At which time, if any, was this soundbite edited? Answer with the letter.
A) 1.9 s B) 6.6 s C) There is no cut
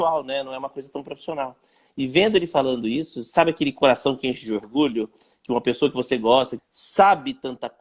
B